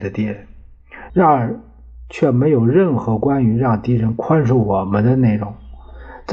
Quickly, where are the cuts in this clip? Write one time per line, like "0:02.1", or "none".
0:01.1